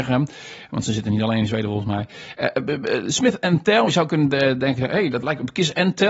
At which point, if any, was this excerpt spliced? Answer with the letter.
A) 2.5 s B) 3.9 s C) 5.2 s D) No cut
D